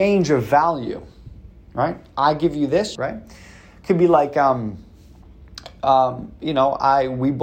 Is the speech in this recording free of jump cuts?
no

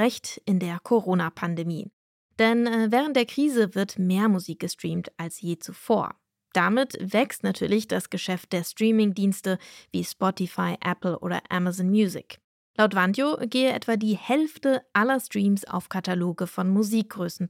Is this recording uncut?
yes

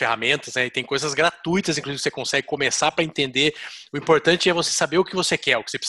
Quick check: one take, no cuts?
yes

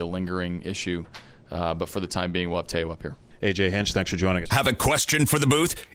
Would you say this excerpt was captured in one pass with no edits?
no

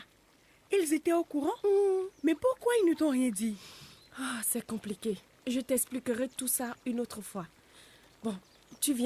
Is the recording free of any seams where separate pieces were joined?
yes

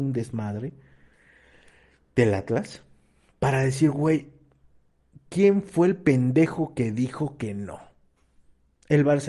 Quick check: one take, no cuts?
yes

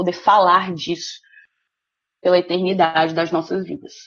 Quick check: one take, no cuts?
yes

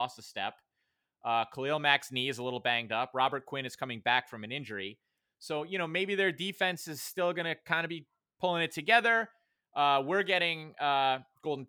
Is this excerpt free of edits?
yes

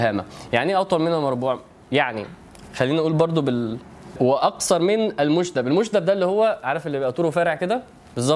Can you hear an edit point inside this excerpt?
yes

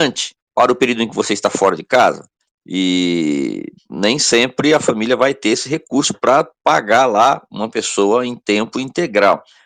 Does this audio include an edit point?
yes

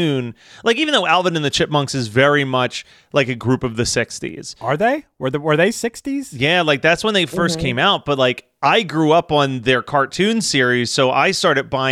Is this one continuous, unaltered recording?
yes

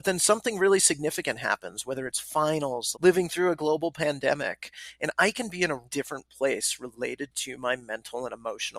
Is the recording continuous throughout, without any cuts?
no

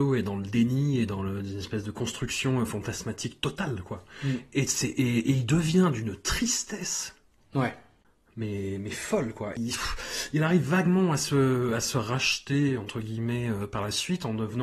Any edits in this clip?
no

